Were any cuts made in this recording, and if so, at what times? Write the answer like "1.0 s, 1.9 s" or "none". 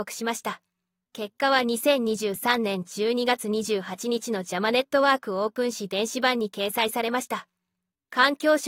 none